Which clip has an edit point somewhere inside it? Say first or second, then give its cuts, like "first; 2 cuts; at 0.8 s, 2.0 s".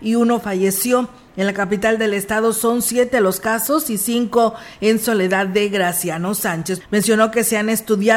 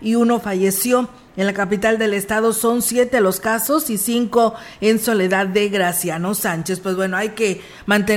first; 1 cut; at 6.8 s